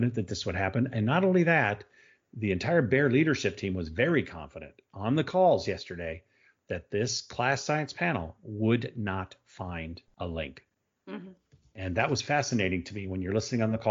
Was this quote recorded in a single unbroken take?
yes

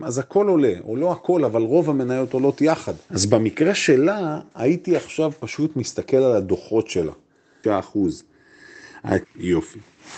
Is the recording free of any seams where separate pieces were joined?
no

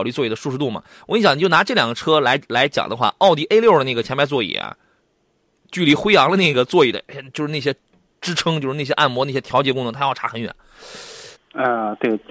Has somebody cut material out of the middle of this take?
yes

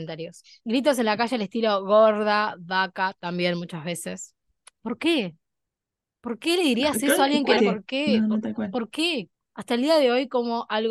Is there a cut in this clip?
yes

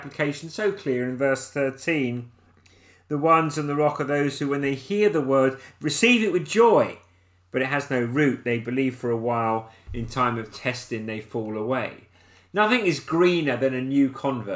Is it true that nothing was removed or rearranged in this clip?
yes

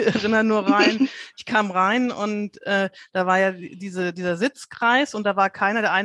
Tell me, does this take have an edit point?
no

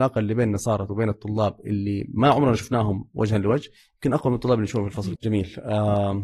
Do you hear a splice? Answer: yes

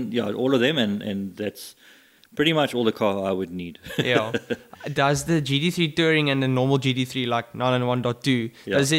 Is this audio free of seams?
no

